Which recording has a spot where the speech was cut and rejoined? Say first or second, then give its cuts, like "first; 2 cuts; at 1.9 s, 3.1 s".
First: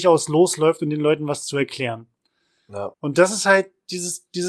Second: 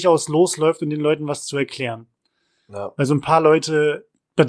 first; 1 cut; at 2.9 s